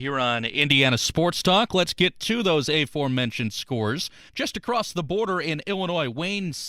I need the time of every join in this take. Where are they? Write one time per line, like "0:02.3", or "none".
0:04.3